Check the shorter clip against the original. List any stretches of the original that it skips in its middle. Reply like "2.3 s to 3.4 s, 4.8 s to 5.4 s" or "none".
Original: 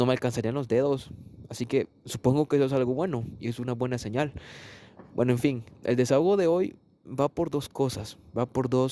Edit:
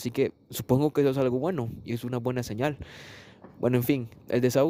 none